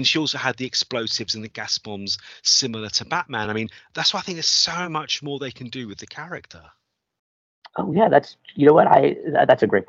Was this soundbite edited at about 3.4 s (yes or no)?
no